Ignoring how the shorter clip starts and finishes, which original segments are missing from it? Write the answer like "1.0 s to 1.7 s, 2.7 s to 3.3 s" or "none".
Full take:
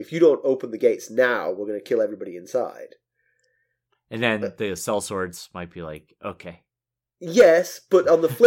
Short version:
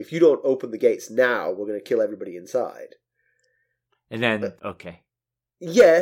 4.6 s to 6.2 s